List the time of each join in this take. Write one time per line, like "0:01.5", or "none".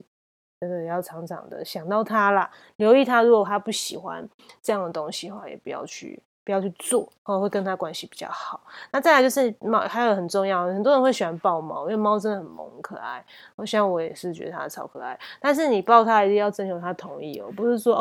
none

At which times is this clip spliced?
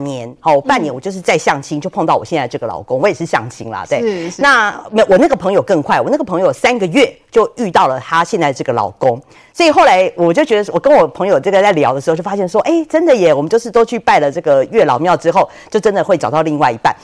none

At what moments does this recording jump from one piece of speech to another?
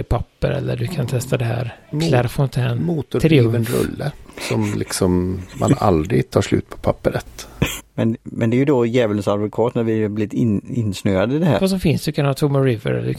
0:07.8
0:11.6

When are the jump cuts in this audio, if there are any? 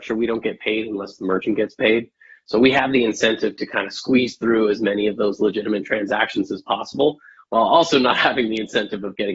none

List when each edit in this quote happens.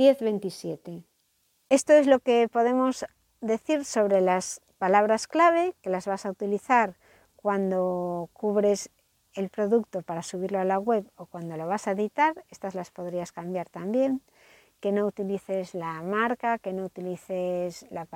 none

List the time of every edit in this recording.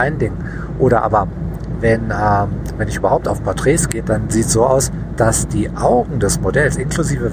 0:04.0
0:05.2

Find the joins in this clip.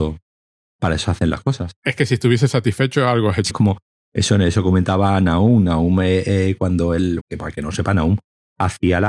0:03.5
0:07.2

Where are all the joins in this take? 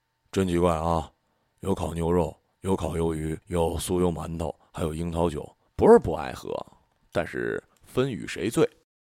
0:03.4
0:05.7

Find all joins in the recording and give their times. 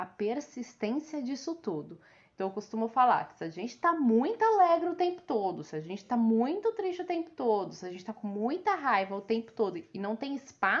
none

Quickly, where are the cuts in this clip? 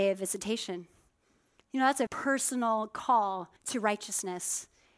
0:02.1
0:03.6

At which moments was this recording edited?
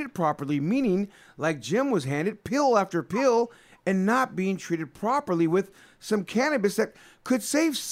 none

